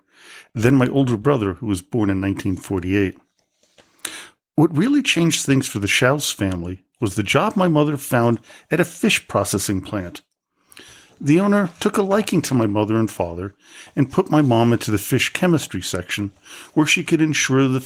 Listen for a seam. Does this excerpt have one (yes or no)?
no